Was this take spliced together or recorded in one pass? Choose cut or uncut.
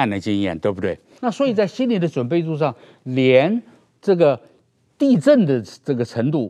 cut